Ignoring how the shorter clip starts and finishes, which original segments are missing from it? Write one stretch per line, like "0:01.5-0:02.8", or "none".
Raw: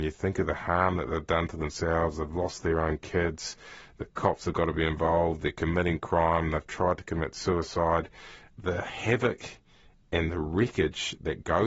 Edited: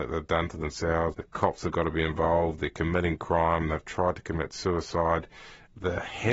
0:02.1-0:03.9